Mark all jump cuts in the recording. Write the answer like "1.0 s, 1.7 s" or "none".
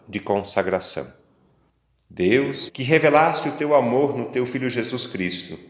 2.7 s